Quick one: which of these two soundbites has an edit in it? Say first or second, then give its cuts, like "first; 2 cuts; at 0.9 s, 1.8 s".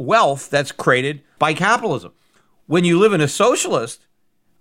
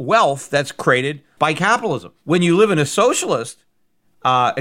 second; 1 cut; at 2.2 s